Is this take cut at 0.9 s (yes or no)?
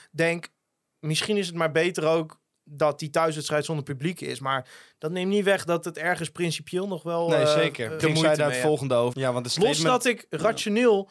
no